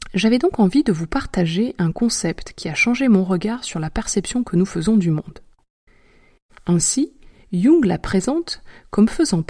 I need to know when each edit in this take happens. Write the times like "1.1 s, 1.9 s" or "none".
6.5 s